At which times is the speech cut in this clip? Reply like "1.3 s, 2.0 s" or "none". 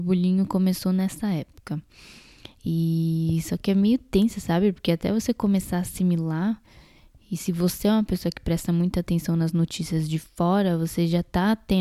none